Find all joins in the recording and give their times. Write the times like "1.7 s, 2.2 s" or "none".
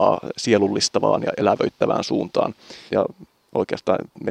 2.9 s